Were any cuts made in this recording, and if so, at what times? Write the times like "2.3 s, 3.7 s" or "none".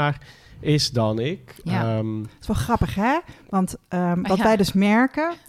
none